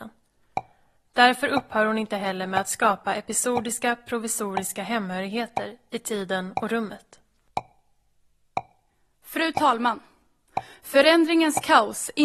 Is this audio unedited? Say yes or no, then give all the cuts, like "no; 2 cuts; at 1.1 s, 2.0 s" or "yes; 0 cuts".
yes; 0 cuts